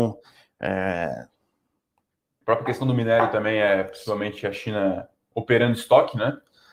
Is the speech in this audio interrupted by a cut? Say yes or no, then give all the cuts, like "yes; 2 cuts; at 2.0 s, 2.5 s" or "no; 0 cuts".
no; 0 cuts